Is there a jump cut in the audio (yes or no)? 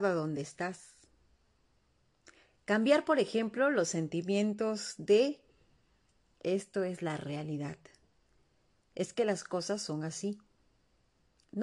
no